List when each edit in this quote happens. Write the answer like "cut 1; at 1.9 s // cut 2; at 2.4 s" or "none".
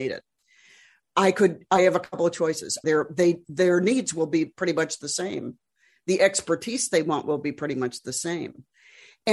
cut 1; at 2.8 s